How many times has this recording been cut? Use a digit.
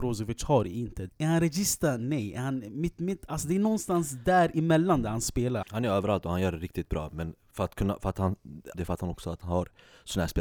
3